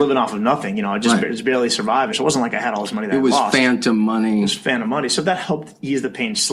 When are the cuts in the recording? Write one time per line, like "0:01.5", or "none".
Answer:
0:02.1